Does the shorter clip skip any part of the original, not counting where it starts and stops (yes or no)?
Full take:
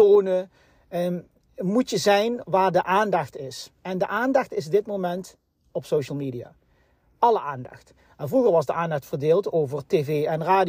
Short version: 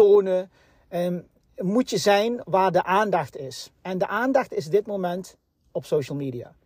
no